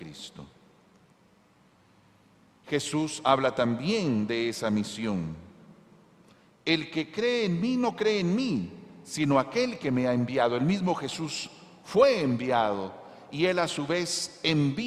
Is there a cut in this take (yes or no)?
no